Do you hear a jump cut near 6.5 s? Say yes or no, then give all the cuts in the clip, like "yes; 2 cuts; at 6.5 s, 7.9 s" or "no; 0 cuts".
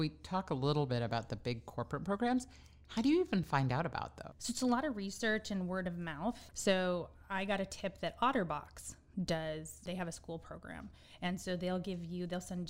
yes; 1 cut; at 6.5 s